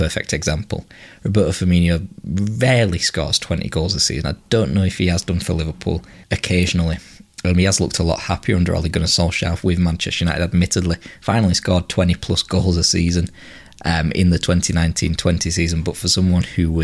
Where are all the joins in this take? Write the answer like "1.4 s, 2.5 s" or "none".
6.2 s

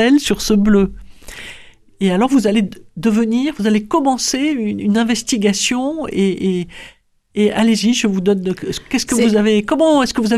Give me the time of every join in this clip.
none

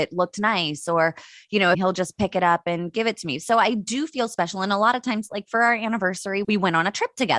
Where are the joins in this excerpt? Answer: 1.7 s, 6.4 s

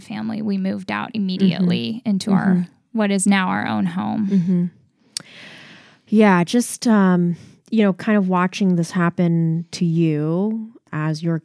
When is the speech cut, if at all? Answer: none

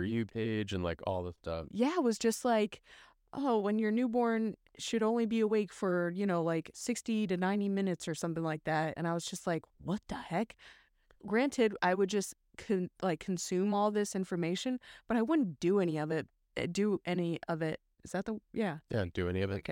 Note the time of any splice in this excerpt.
9.0 s

